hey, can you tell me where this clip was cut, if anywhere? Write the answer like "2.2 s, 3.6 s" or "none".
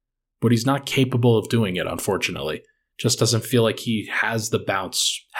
none